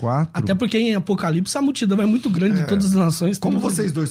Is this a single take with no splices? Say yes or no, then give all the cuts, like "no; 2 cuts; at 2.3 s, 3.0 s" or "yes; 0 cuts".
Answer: yes; 0 cuts